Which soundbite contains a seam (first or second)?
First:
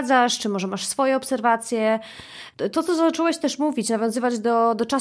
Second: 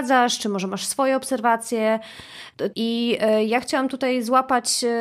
second